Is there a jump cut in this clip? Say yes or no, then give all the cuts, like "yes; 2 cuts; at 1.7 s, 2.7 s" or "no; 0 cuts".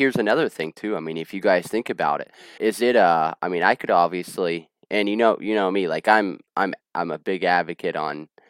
yes; 1 cut; at 2.6 s